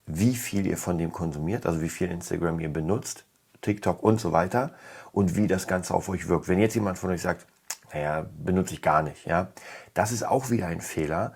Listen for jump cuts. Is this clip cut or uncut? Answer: uncut